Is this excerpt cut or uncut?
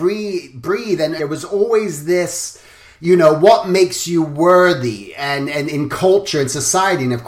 cut